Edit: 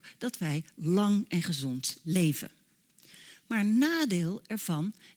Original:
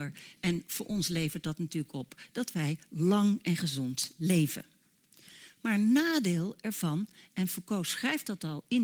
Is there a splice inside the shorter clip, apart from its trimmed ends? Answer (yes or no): no